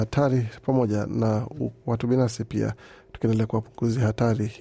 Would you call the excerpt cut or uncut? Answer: cut